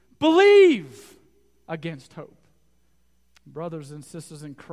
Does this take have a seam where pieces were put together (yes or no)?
yes